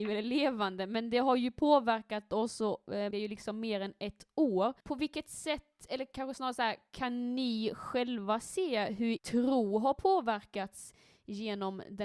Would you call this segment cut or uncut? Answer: cut